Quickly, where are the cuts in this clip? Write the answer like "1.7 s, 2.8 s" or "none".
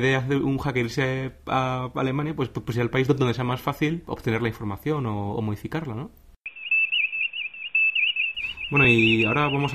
none